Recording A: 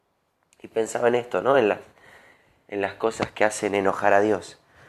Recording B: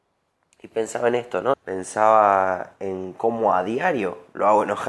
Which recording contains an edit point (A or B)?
B